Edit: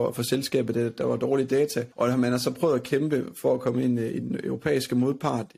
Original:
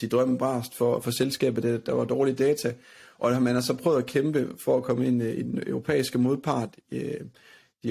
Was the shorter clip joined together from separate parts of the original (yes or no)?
yes